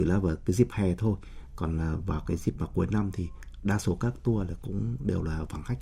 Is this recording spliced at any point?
no; 0 cuts

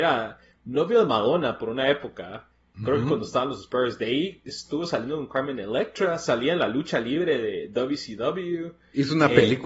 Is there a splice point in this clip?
no; 0 cuts

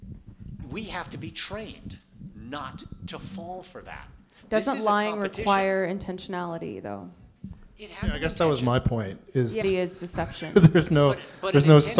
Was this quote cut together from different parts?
yes; 1 cut; at 9.6 s

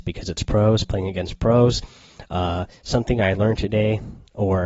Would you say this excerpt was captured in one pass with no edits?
yes; 0 cuts

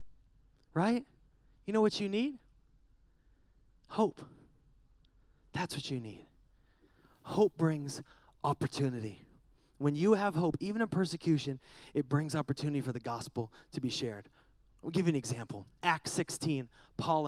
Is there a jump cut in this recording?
no; 0 cuts

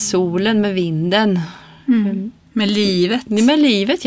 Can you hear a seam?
no; 0 cuts

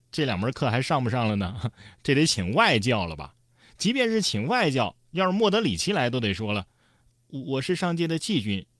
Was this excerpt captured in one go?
yes; 0 cuts

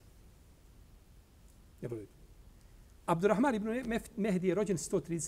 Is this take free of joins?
yes; 0 cuts

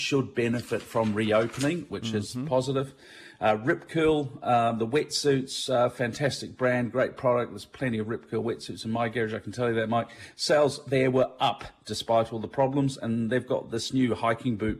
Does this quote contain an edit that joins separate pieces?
no; 0 cuts

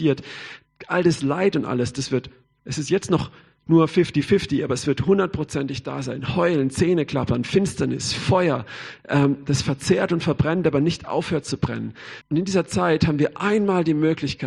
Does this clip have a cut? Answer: yes; 1 cut; at 12.2 s

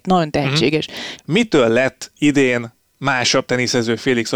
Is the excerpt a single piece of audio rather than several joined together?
no; 1 cut; at 1.2 s

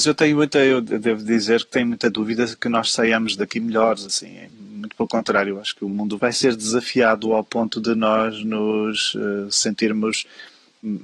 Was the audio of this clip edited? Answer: no; 0 cuts

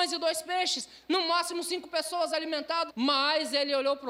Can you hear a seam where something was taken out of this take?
yes; 1 cut; at 2.9 s

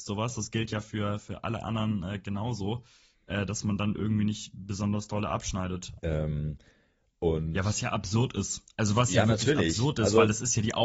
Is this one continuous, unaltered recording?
no; 1 cut; at 6.0 s

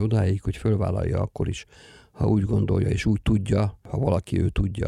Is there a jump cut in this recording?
no; 0 cuts

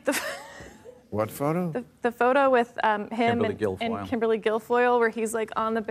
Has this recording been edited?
no; 0 cuts

